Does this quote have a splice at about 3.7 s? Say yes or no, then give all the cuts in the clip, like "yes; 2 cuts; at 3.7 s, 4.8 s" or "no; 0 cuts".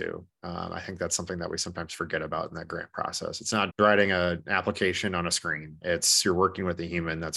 yes; 1 cut; at 3.7 s